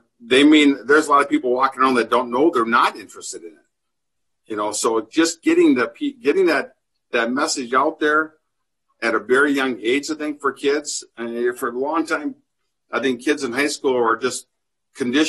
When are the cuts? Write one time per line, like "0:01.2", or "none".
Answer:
none